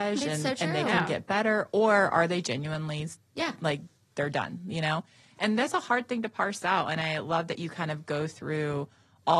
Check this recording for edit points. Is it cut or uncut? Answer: uncut